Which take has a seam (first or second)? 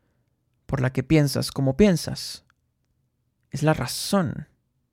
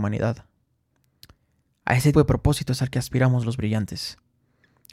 second